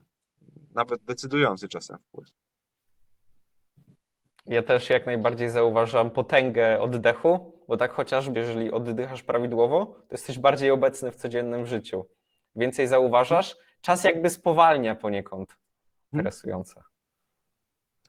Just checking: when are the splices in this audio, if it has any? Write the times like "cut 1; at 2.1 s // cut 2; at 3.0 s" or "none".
cut 1; at 8.3 s // cut 2; at 16.1 s